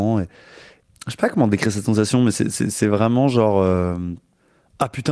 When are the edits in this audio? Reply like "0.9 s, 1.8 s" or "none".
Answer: none